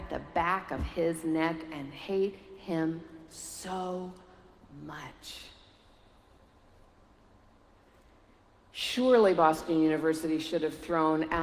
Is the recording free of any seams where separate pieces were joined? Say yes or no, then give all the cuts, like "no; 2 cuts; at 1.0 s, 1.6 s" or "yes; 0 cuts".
yes; 0 cuts